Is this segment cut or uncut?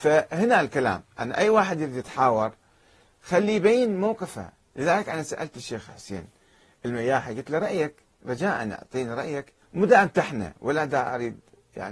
cut